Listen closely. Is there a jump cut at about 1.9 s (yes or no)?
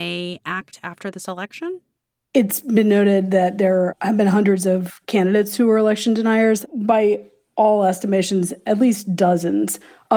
no